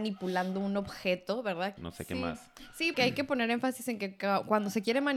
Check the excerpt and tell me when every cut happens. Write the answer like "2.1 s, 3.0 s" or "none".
1.8 s, 2.9 s